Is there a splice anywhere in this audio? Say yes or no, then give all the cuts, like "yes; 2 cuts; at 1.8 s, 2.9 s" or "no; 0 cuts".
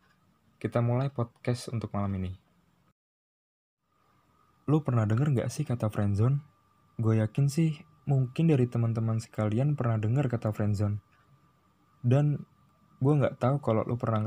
no; 0 cuts